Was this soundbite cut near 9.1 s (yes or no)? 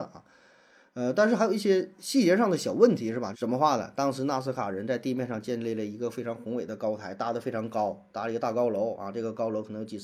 no